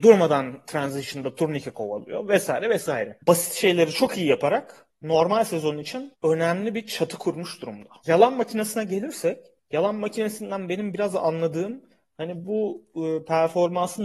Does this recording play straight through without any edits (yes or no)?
yes